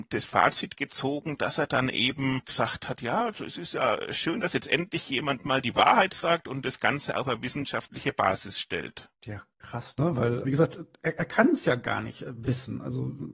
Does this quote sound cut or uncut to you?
cut